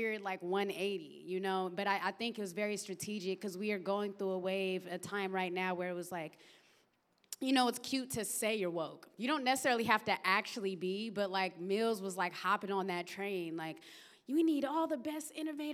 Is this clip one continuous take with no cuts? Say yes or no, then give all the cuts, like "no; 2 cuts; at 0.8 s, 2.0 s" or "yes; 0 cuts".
yes; 0 cuts